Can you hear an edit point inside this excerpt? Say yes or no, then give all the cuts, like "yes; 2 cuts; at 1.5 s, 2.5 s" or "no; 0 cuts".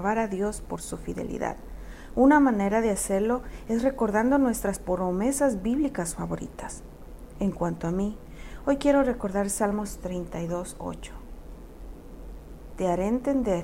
yes; 1 cut; at 12.7 s